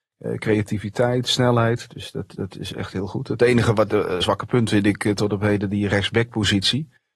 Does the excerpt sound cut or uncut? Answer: uncut